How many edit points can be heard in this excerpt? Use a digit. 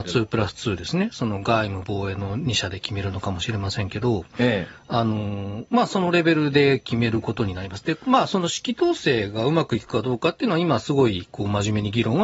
0